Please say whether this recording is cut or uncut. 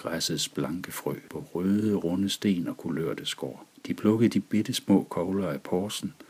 cut